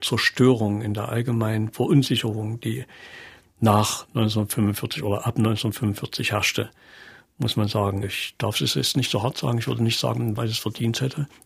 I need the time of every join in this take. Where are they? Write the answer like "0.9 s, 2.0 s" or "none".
8.0 s, 10.4 s